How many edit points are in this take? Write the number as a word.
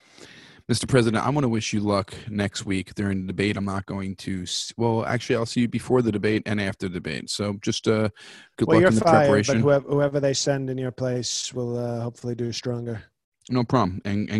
zero